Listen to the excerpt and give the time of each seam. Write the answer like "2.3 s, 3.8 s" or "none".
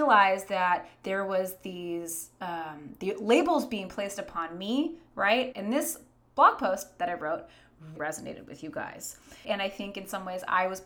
5.5 s, 8.0 s, 9.4 s